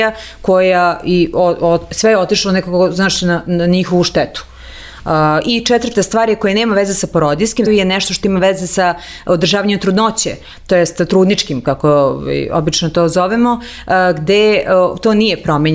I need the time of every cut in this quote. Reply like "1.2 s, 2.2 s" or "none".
7.7 s